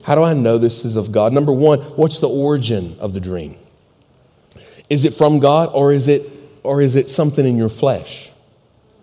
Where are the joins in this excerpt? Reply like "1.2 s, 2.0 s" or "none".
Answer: none